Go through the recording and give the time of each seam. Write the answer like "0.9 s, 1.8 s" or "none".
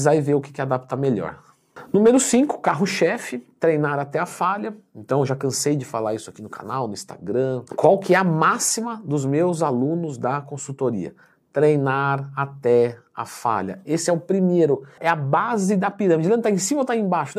15.0 s